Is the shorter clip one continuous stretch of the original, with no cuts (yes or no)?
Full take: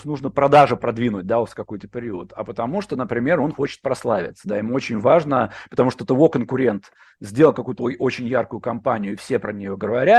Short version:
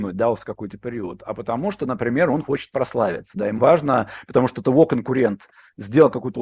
no